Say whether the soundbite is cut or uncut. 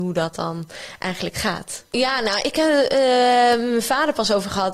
cut